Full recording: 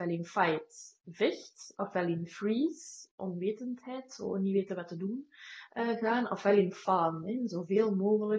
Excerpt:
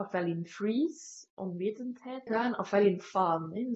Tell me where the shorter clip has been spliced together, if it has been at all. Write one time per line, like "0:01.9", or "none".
0:02.3